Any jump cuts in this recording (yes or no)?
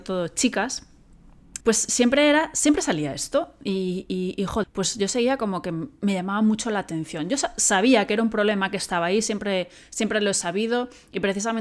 yes